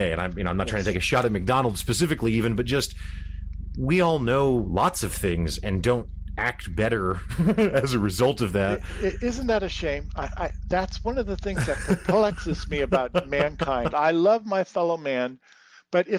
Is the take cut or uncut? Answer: cut